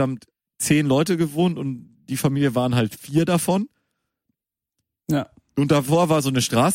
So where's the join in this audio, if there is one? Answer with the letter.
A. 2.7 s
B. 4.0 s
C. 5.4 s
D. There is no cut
D